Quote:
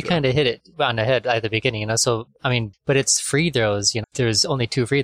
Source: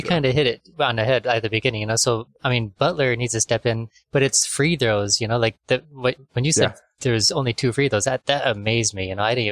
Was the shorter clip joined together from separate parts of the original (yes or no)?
yes